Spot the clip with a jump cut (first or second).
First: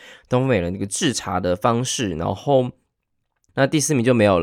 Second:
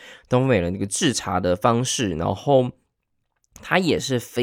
first